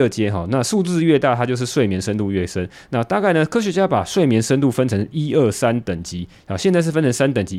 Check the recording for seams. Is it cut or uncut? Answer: uncut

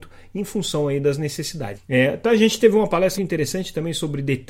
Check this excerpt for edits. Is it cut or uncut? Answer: cut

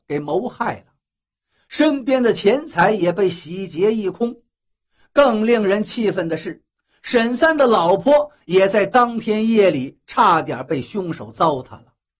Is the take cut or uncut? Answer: uncut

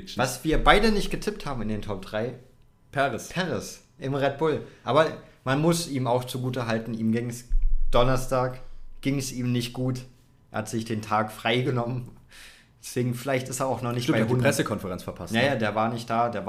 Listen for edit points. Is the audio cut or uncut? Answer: uncut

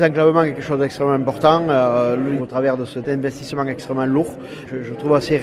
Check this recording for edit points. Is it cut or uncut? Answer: cut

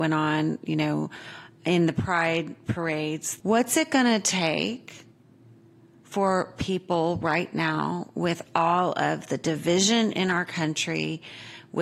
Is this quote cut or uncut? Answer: cut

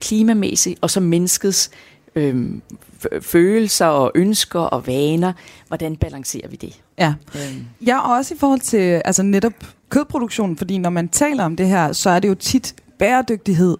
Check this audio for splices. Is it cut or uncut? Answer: uncut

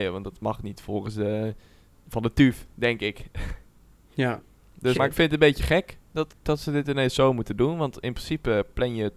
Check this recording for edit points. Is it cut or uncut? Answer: cut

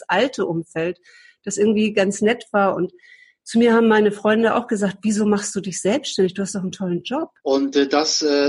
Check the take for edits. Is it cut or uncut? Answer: cut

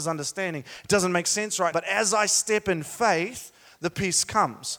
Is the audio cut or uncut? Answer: cut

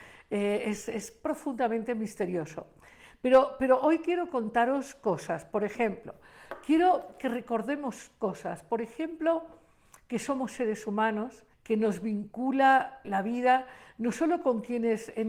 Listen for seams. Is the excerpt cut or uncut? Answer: cut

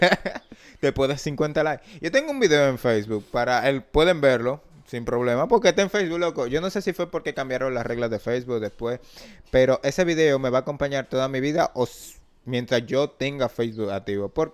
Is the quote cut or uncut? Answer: uncut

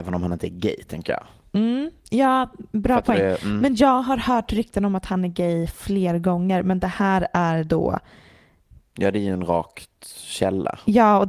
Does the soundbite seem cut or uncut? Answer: uncut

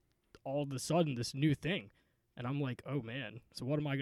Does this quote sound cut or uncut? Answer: uncut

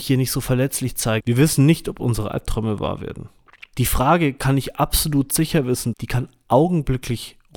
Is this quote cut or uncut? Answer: cut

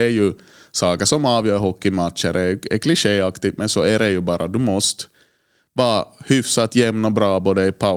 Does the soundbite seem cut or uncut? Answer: uncut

